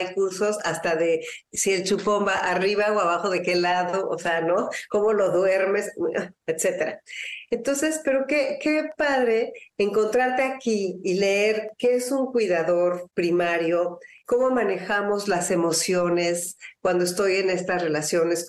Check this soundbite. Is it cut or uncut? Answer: uncut